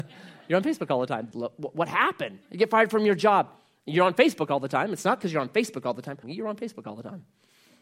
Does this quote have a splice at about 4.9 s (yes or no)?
no